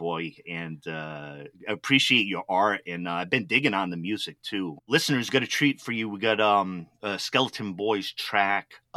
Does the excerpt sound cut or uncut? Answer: uncut